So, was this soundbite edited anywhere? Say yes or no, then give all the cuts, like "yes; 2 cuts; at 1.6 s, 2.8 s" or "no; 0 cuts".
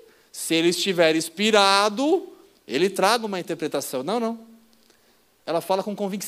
no; 0 cuts